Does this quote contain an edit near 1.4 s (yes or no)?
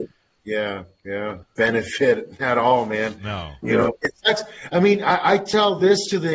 yes